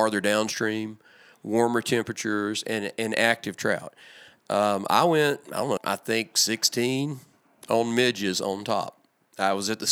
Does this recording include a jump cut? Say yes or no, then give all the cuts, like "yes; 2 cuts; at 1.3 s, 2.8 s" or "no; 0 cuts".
yes; 1 cut; at 5.8 s